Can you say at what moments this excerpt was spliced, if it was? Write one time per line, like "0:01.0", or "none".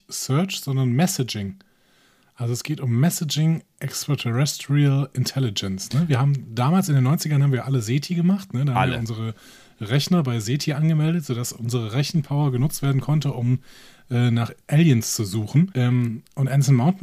0:15.7